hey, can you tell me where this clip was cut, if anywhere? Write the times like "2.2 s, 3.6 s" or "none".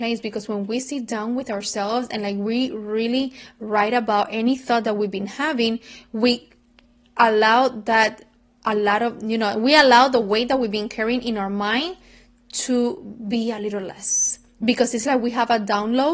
none